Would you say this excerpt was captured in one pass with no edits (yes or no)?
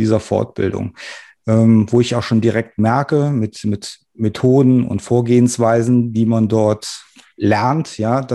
yes